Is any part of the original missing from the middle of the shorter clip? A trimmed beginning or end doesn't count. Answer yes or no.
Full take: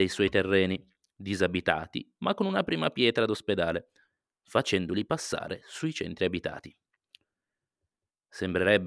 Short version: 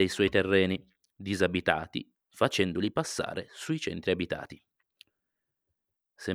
yes